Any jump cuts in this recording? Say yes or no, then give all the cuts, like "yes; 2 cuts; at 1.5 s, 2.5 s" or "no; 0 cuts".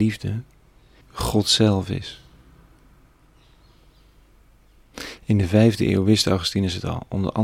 yes; 1 cut; at 1.0 s